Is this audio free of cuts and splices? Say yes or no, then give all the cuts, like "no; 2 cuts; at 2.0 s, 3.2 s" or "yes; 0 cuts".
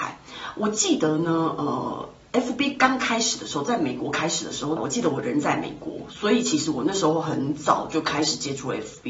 no; 1 cut; at 4.8 s